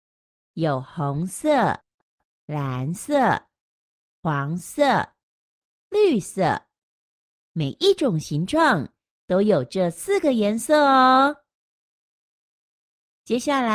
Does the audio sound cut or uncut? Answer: uncut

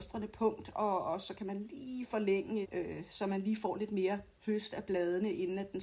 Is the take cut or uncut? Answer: cut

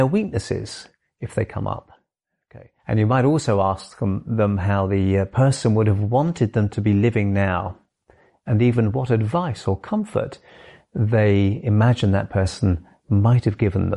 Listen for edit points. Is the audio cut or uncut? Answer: cut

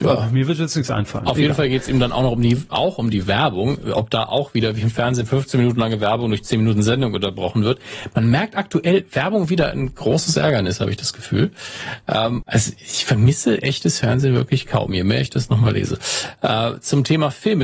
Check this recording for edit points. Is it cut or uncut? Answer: cut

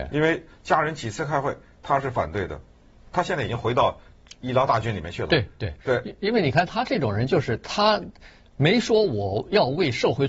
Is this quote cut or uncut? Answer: cut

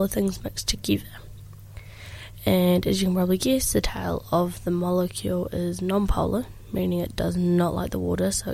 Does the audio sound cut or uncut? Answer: cut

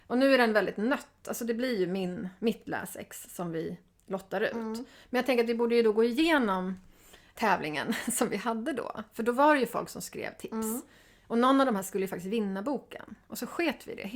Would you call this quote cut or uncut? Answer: cut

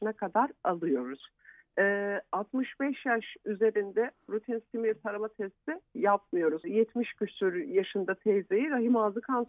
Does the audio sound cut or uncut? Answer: cut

